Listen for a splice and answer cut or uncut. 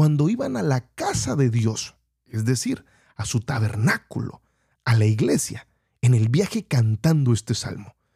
uncut